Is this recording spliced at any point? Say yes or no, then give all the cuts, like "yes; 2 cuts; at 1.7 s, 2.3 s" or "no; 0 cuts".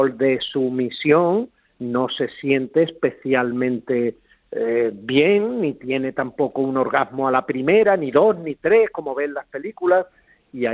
no; 0 cuts